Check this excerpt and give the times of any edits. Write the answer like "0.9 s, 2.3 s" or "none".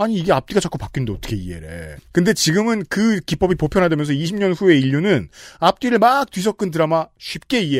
2.0 s

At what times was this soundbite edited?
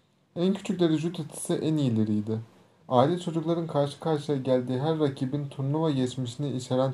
2.8 s

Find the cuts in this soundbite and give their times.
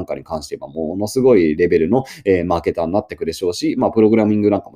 none

